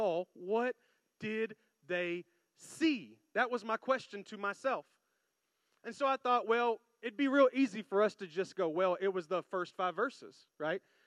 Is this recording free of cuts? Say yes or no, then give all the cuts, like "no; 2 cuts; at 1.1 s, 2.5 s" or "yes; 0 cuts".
yes; 0 cuts